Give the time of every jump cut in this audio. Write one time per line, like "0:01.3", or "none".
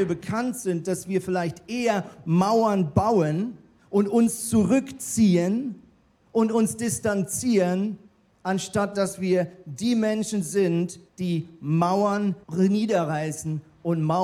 0:11.1
0:12.4